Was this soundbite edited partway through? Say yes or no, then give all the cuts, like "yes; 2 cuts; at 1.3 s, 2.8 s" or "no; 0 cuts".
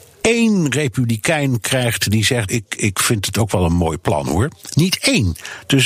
yes; 1 cut; at 2.5 s